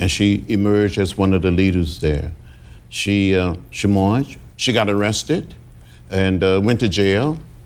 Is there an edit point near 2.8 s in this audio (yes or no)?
no